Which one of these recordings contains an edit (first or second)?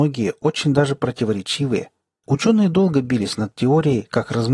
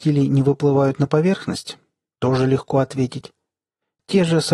first